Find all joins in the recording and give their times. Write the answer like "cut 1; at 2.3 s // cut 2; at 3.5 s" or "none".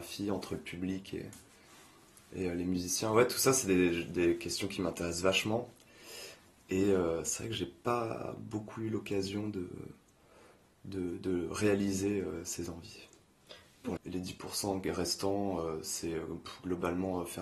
cut 1; at 14.0 s